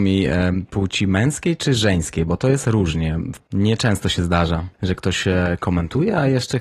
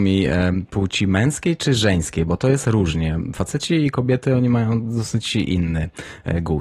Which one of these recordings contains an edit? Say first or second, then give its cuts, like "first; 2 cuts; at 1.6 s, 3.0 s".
first; 2 cuts; at 3.4 s, 4.7 s